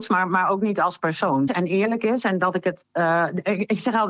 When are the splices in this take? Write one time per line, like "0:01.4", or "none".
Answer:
0:01.5